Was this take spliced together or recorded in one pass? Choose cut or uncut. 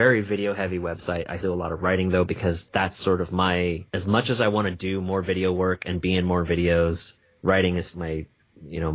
cut